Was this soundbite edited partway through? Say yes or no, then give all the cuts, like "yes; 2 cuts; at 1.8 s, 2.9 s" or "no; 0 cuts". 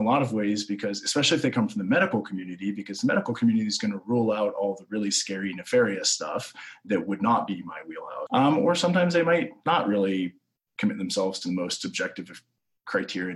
yes; 1 cut; at 8.3 s